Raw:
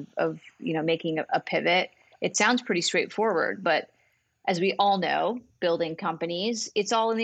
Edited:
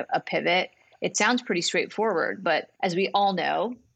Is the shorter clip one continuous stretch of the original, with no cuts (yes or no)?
no